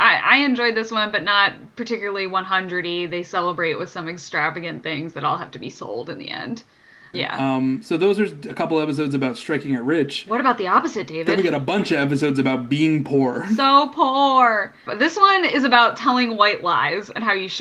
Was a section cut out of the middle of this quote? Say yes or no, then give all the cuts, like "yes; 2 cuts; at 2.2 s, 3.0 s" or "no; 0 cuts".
yes; 2 cuts; at 7.1 s, 14.9 s